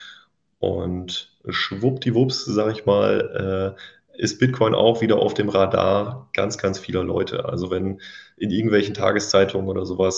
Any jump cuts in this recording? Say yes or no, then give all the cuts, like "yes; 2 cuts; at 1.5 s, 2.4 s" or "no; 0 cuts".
no; 0 cuts